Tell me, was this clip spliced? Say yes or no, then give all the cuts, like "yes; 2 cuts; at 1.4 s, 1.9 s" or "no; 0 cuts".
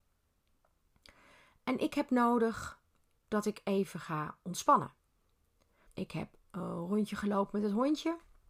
yes; 1 cut; at 5.9 s